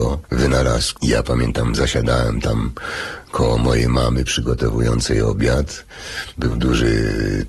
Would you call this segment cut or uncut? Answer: cut